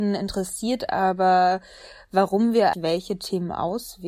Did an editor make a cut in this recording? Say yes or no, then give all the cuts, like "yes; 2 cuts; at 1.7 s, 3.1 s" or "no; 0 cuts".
yes; 1 cut; at 2.7 s